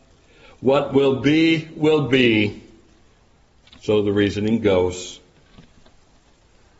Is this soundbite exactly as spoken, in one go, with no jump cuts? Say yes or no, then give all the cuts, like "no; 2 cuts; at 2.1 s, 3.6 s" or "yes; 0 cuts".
yes; 0 cuts